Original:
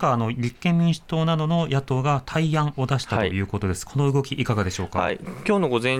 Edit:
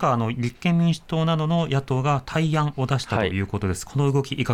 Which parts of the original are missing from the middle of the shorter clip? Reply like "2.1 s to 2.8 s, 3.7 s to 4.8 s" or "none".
none